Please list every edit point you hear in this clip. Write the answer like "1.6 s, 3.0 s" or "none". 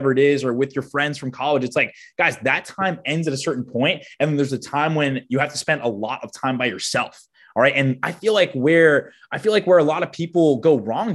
none

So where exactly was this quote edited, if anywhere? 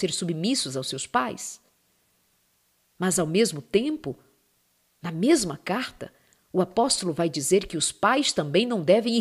none

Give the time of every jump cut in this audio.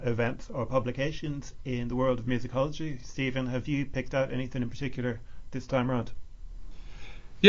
none

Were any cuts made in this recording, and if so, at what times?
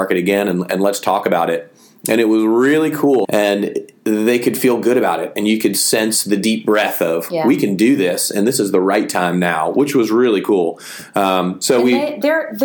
3.2 s

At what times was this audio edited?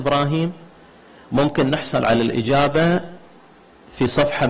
none

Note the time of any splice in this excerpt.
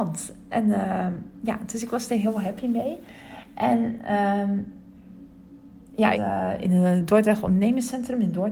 6.1 s

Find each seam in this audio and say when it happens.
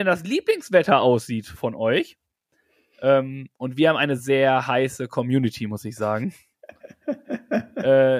4.2 s

